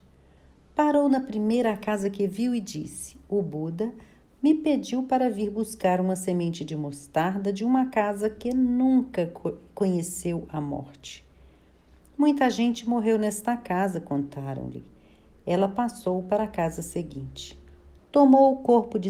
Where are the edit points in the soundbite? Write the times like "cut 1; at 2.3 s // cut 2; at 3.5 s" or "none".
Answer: cut 1; at 18.0 s